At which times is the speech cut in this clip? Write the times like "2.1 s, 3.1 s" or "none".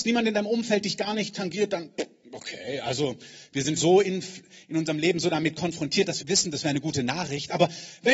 3.8 s, 6.2 s